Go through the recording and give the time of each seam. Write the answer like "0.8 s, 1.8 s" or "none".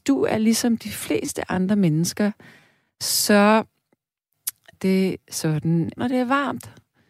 4.7 s, 6.0 s